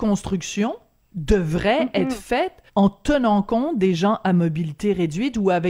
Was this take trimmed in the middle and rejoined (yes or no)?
yes